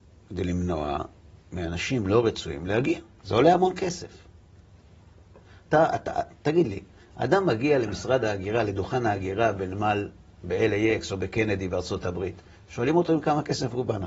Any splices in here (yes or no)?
yes